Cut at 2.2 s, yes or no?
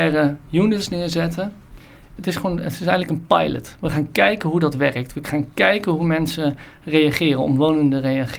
yes